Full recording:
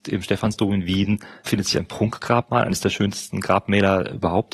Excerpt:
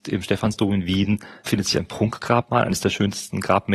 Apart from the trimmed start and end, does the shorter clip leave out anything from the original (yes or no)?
no